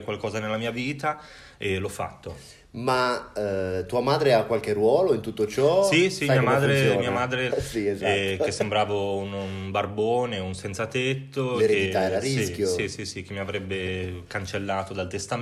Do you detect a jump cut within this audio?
yes; 1 cut; at 7.5 s

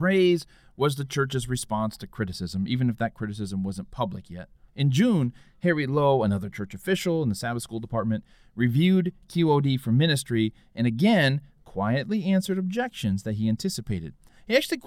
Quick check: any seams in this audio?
yes; 1 cut; at 4.7 s

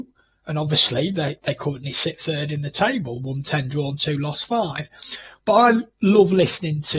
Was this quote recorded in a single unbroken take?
yes; 0 cuts

